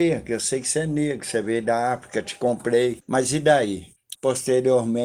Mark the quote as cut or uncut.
cut